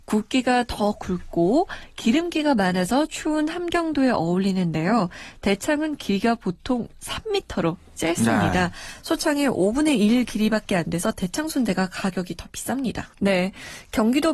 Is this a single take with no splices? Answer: no; 1 cut; at 13.1 s

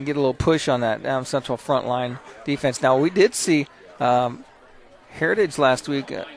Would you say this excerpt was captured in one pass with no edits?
no; 1 cut; at 5.0 s

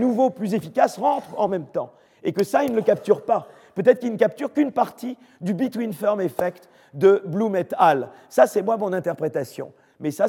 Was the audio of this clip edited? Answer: no; 0 cuts

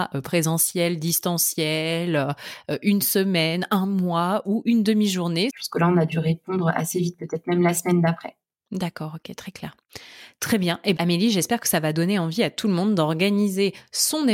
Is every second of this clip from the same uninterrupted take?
no; 2 cuts; at 5.5 s, 11.0 s

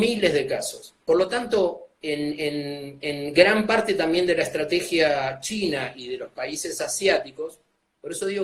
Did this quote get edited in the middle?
yes; 1 cut; at 1.0 s

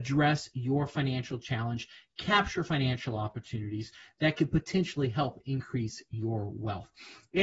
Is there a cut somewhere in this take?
no; 0 cuts

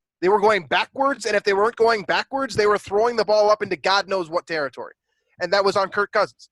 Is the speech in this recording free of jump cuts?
yes; 0 cuts

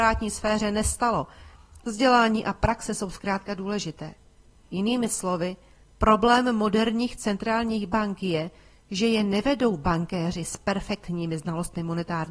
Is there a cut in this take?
yes; 1 cut; at 1.8 s

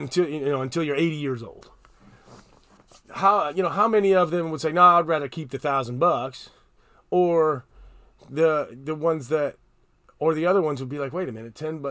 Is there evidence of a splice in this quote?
no; 0 cuts

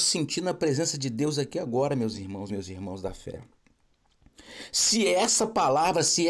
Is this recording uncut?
no; 1 cut; at 2.5 s

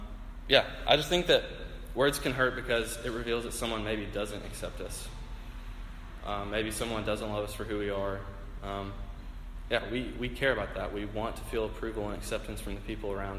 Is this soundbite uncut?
yes; 0 cuts

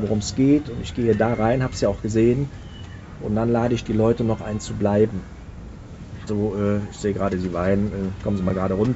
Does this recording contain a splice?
yes; 1 cut; at 6.3 s

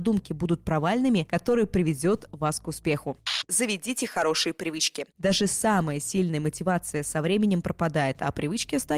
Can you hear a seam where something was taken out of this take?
yes; 1 cut; at 1.3 s

